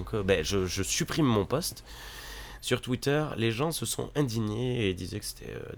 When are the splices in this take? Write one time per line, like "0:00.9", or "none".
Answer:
0:02.6